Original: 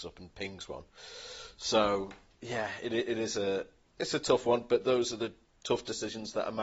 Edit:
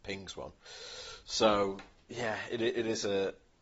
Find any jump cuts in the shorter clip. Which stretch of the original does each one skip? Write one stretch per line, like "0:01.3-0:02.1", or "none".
none